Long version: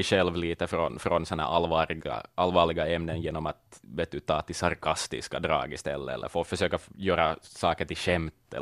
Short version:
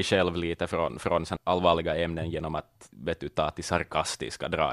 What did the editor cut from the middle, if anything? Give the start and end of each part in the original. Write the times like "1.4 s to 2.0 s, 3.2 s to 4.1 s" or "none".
1.4 s to 2.3 s